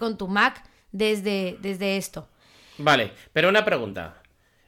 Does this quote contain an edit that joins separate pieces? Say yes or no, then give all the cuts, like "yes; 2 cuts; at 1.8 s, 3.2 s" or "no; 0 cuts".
no; 0 cuts